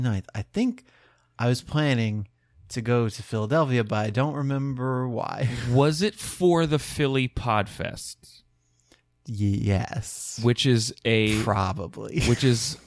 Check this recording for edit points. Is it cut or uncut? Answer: uncut